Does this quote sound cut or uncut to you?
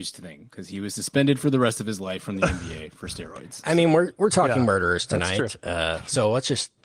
uncut